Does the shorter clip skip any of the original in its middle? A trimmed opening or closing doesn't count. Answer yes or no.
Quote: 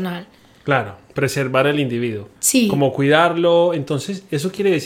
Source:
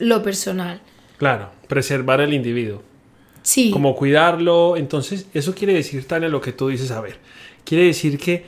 yes